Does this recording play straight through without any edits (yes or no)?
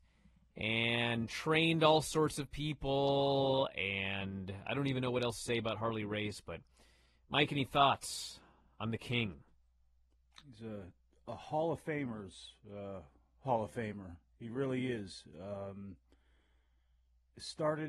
yes